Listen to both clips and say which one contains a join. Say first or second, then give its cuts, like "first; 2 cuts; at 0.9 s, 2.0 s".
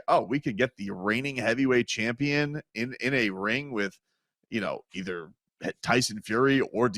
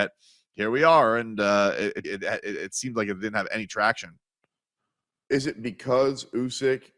second; 1 cut; at 2.0 s